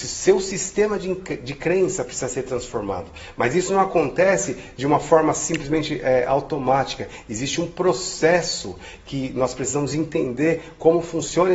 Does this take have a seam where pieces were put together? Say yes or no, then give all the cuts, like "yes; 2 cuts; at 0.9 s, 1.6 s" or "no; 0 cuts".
no; 0 cuts